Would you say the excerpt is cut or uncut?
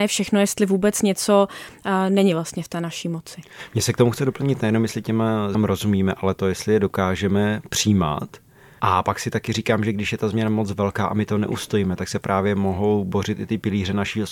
cut